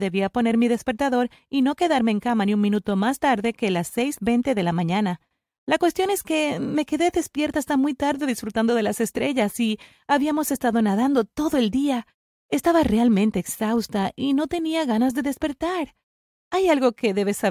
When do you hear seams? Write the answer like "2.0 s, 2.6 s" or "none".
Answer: none